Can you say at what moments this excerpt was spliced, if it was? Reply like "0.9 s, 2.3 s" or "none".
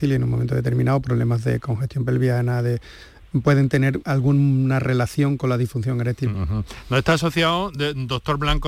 4.0 s, 6.3 s

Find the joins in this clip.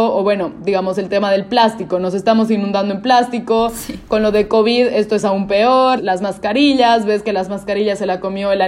6.0 s

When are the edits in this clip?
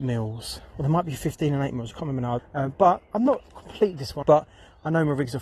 2.4 s, 4.2 s

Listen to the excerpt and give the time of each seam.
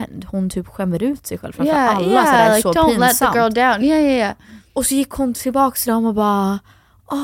none

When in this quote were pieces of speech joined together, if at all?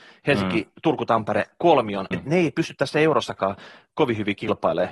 2.1 s

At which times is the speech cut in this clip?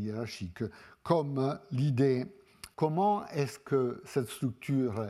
2.7 s

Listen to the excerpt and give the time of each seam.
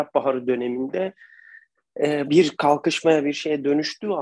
2.2 s

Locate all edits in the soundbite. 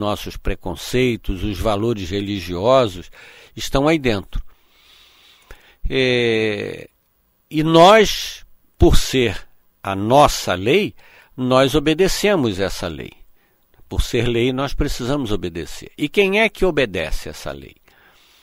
none

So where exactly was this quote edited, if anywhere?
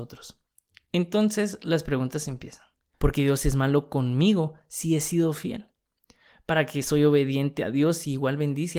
2.9 s

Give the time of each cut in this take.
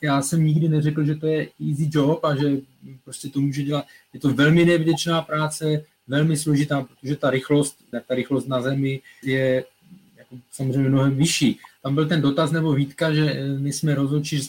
7.9 s, 9.2 s, 11.8 s

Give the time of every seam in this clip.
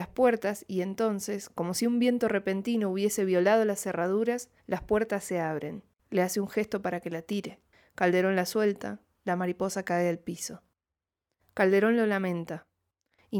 6.0 s, 11.4 s

